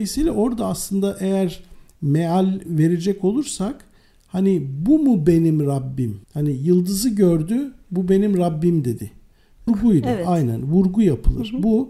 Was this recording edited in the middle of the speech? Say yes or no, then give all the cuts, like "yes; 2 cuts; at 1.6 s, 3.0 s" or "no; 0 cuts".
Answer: yes; 2 cuts; at 6.2 s, 9.7 s